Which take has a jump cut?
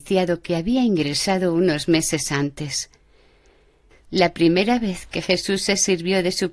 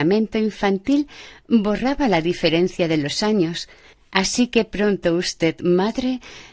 first; 1 cut; at 4.0 s

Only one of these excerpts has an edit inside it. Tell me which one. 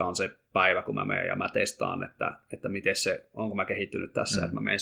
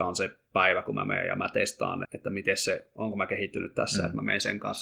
second; 1 cut; at 2.0 s

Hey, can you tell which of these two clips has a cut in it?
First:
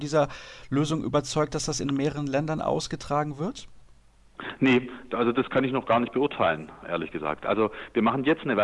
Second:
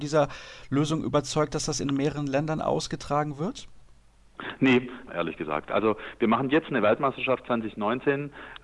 second; 1 cut; at 5.1 s

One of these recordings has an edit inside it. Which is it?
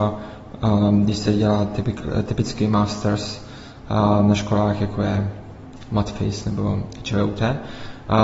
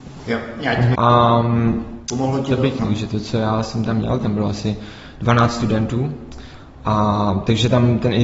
second; 3 cuts; at 0.9 s, 2.8 s, 4.2 s

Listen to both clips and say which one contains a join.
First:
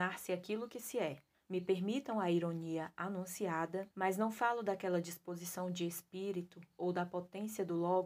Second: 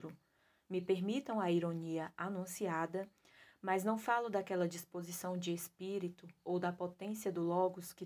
first; 2 cuts; at 1.3 s, 3.9 s

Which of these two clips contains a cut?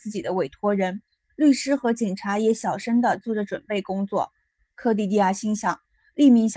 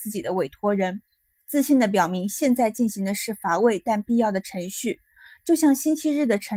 first; 1 cut; at 1.3 s

